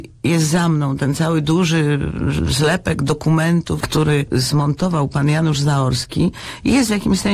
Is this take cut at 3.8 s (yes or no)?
yes